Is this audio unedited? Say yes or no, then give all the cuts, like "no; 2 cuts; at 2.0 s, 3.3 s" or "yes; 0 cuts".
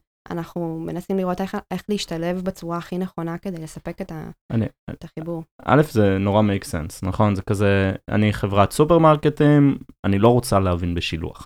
yes; 0 cuts